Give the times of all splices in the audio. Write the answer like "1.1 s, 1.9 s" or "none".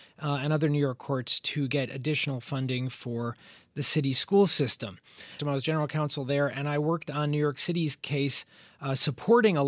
5.4 s

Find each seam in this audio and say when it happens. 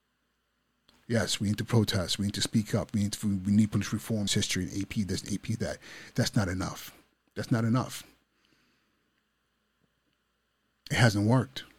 4.3 s

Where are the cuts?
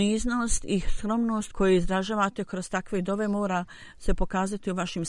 1.5 s

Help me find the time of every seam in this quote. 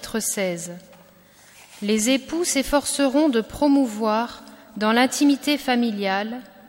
none

